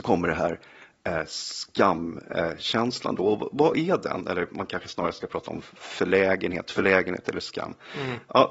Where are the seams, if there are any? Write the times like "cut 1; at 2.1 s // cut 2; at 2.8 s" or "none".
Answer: none